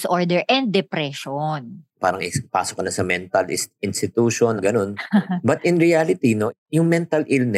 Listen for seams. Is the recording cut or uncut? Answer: cut